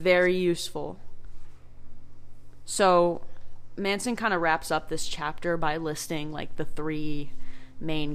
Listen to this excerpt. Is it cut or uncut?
uncut